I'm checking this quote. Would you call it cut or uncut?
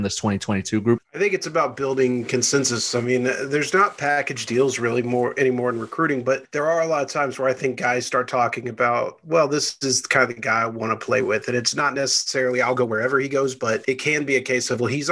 uncut